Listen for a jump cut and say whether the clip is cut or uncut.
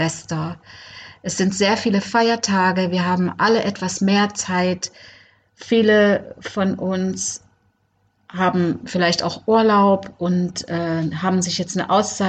uncut